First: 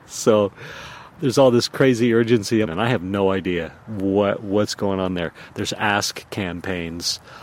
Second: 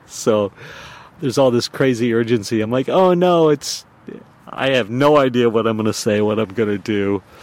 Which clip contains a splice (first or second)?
first